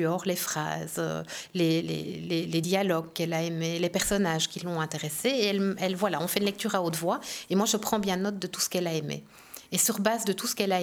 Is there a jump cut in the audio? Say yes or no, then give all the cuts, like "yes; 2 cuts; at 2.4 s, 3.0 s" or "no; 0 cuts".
no; 0 cuts